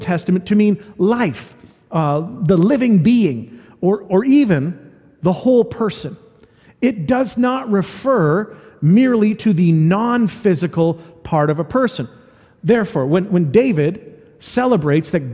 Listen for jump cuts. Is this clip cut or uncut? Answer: uncut